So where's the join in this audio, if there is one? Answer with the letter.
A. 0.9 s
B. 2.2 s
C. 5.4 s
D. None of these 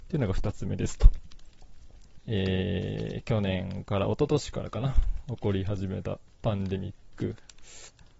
B